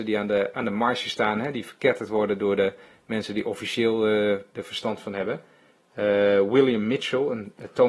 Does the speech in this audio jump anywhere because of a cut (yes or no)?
no